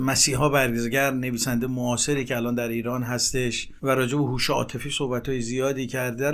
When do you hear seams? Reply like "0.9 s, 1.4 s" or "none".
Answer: 3.8 s